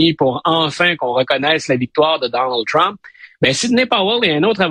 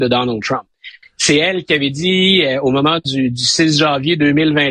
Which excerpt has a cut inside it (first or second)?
second